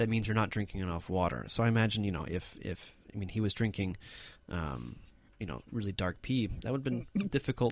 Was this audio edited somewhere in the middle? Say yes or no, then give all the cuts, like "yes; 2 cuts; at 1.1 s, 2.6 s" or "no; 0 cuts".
no; 0 cuts